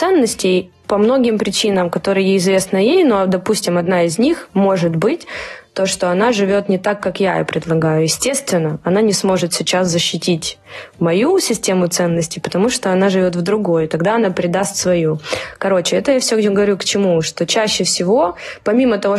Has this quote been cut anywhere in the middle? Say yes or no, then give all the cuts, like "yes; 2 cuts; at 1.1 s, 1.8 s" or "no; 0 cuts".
no; 0 cuts